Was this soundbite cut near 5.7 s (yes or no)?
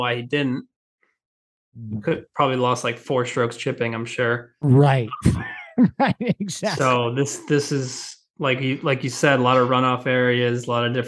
no